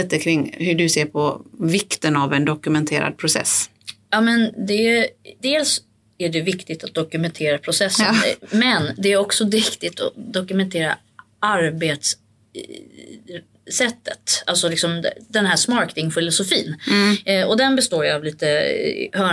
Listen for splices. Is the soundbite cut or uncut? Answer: uncut